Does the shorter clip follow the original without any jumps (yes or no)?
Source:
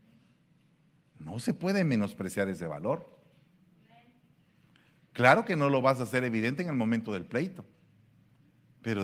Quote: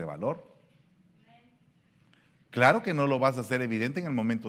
yes